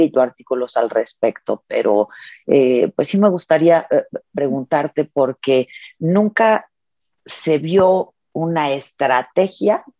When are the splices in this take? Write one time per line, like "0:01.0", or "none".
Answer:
none